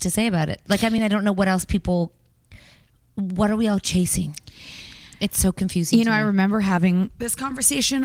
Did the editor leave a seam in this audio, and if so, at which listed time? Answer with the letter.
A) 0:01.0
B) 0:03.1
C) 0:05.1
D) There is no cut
D